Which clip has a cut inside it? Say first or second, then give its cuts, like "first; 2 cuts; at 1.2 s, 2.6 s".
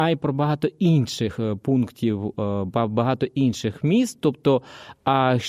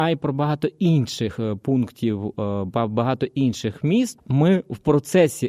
second; 1 cut; at 4.2 s